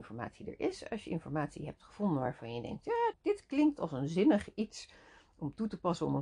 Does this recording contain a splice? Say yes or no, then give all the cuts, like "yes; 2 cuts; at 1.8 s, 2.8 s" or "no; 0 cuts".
yes; 1 cut; at 3.1 s